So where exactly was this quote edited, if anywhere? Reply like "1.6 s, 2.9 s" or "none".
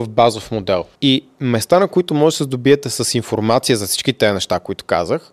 1.0 s